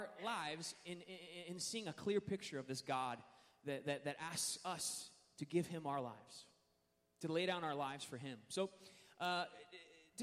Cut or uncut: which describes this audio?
uncut